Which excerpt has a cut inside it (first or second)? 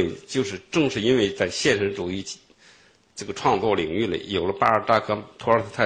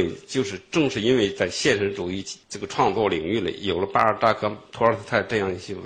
second